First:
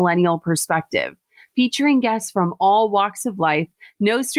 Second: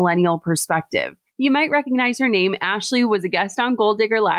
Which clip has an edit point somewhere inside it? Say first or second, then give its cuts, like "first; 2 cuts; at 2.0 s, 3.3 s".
second; 1 cut; at 1.3 s